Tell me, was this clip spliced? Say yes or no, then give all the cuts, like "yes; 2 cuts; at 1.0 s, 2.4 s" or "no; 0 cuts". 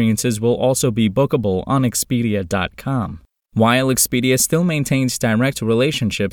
no; 0 cuts